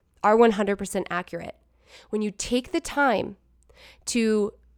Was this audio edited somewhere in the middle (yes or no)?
no